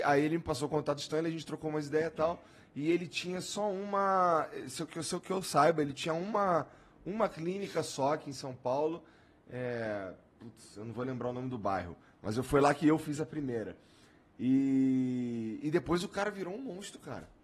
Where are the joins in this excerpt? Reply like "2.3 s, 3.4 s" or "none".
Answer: none